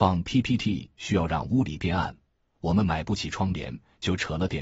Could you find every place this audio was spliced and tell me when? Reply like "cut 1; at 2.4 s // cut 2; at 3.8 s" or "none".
none